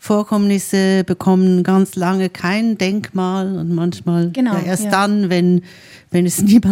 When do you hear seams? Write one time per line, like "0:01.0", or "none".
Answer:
none